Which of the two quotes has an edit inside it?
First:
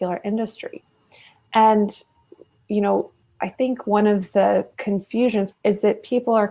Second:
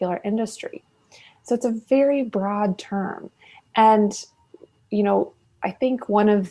first; 2 cuts; at 1.5 s, 5.5 s

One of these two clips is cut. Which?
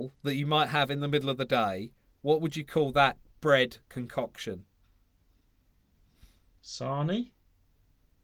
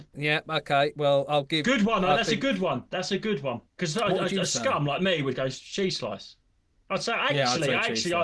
second; 1 cut; at 3.7 s

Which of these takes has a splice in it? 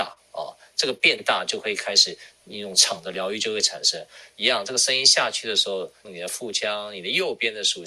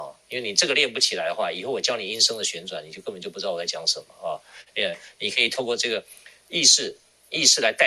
first; 2 cuts; at 4.3 s, 6.0 s

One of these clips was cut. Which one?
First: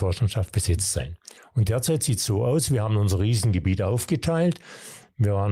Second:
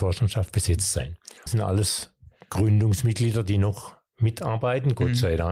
second; 1 cut; at 1.5 s

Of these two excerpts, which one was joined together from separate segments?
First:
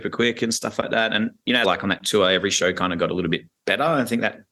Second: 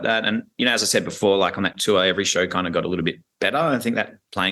first; 1 cut; at 1.6 s

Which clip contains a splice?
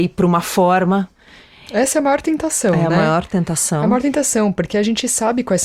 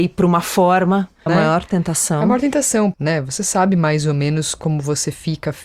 second; 2 cuts; at 1.3 s, 2.9 s

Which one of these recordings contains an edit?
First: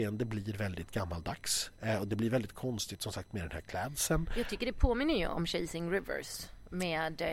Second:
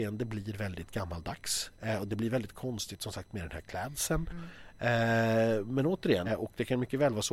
second; 2 cuts; at 4.3 s, 6.3 s

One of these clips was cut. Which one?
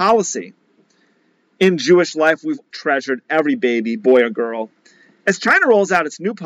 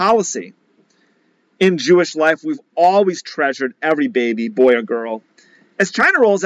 first; 1 cut; at 2.7 s

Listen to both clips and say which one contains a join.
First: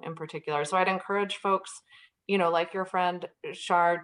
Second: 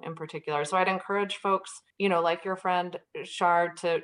second; 1 cut; at 1.9 s

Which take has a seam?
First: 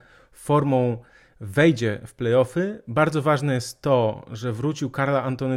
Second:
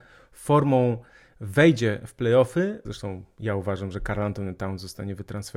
second; 1 cut; at 2.8 s

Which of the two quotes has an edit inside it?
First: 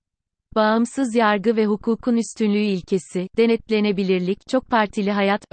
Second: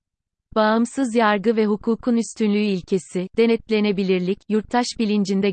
first; 1 cut; at 4.4 s

